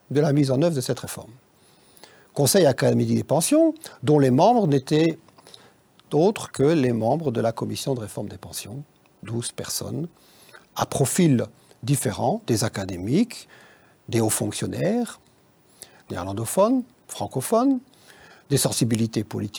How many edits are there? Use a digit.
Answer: 1